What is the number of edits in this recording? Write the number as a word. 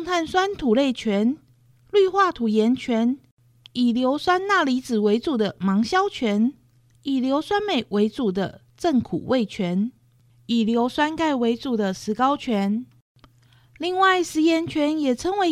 two